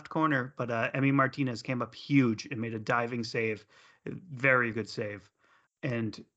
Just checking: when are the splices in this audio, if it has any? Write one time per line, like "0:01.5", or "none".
0:04.7